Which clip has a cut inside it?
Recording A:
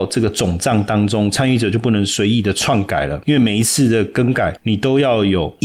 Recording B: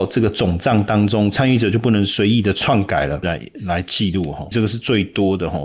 B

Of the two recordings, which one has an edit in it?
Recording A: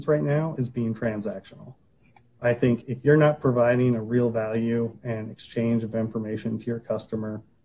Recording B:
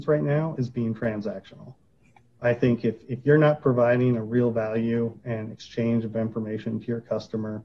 A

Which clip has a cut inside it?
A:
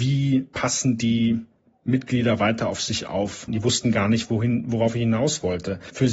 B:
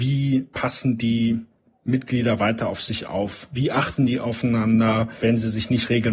A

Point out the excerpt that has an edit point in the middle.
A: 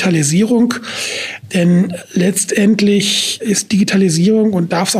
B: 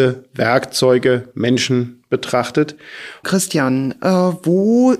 B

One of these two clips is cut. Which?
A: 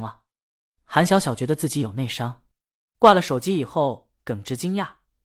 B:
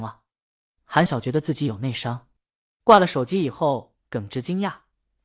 B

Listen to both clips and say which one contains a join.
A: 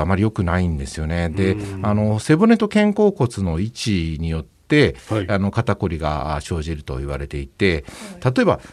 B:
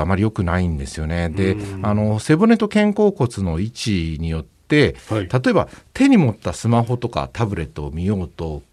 B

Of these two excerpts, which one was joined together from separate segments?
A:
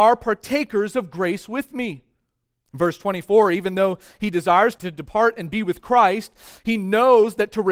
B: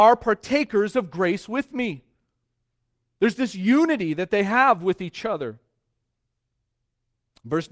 A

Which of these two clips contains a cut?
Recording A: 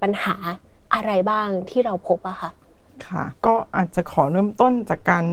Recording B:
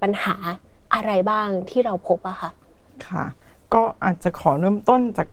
A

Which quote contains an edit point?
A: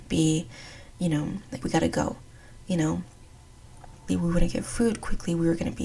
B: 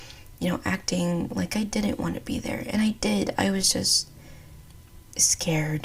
A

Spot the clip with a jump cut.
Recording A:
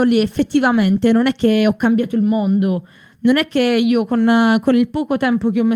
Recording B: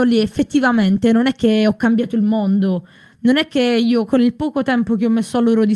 B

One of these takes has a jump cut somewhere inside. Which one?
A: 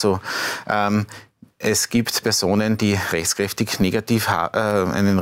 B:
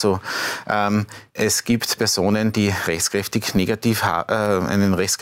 B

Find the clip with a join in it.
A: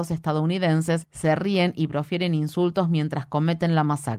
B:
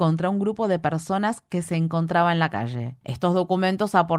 B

